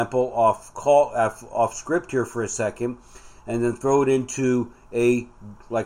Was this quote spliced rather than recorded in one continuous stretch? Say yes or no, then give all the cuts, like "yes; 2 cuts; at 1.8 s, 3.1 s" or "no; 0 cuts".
yes; 1 cut; at 3.4 s